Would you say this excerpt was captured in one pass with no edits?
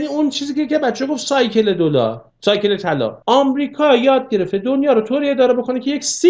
no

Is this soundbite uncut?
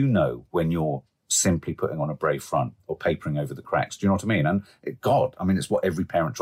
yes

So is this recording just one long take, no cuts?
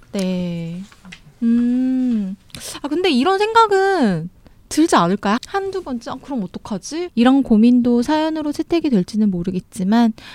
no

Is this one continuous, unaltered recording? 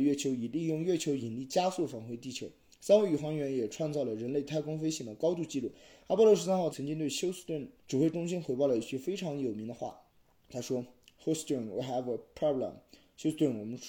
no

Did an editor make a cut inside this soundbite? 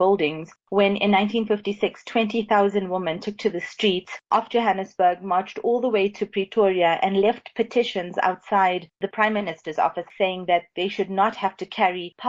no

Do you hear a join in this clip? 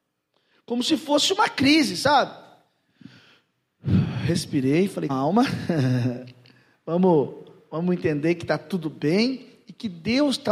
yes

